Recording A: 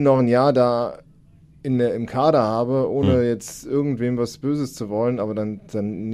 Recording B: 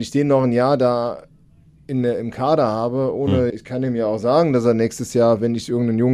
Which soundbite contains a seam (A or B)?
B